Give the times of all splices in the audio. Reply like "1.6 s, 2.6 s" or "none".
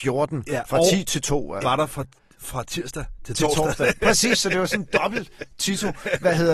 1.6 s